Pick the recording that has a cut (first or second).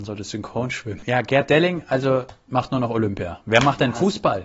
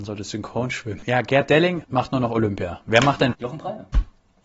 second